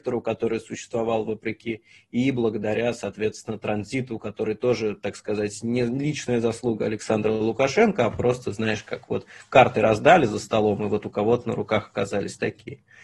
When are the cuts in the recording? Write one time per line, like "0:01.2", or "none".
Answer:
none